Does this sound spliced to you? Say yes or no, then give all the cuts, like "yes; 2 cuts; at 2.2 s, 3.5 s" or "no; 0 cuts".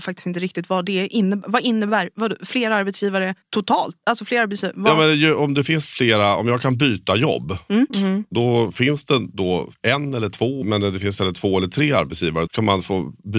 yes; 3 cuts; at 7.9 s, 10.6 s, 12.5 s